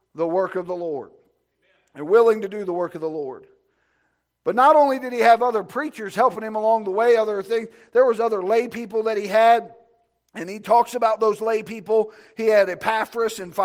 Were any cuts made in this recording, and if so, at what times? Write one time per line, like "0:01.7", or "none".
none